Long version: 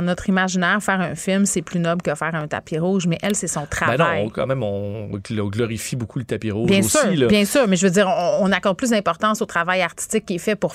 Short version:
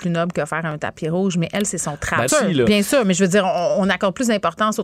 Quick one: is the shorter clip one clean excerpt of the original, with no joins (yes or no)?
no